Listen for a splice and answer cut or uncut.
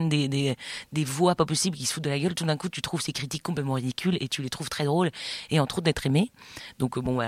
cut